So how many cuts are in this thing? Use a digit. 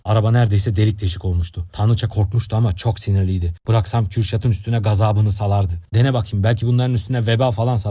0